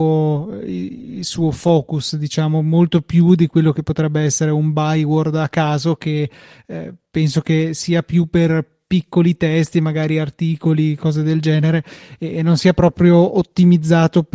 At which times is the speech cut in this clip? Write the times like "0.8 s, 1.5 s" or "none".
none